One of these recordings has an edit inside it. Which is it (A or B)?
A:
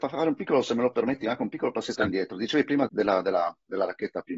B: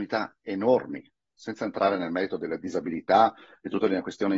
A